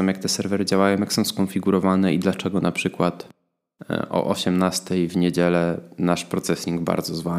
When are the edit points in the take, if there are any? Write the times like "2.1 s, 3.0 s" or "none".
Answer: none